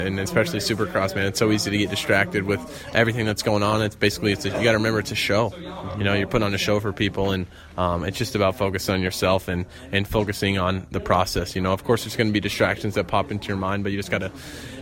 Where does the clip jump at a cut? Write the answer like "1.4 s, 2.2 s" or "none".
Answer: none